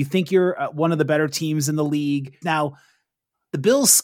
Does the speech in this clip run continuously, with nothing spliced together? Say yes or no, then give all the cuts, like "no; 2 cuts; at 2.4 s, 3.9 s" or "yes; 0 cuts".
no; 1 cut; at 2.4 s